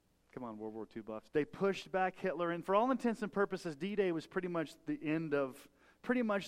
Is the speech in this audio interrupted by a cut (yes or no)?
yes